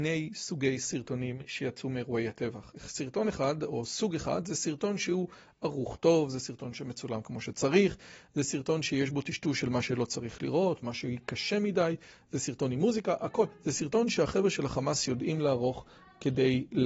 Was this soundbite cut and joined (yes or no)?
no